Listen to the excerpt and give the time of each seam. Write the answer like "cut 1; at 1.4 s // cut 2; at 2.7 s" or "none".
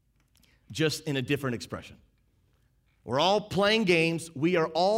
none